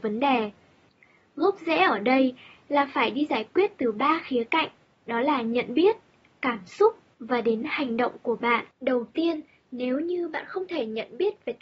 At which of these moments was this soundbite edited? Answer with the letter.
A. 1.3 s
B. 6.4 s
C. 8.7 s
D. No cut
C